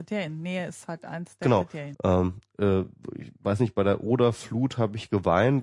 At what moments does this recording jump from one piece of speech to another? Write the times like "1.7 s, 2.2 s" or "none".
1.9 s